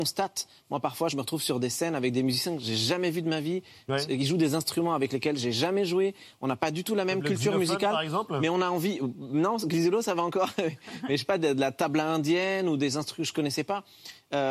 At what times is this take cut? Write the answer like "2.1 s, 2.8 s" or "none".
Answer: none